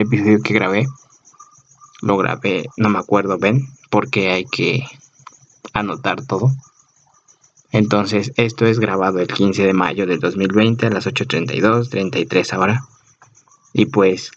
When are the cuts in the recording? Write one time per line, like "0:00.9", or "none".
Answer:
none